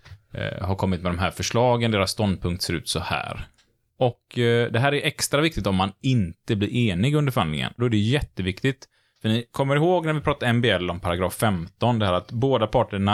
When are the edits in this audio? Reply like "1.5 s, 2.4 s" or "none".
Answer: 3.9 s, 7.8 s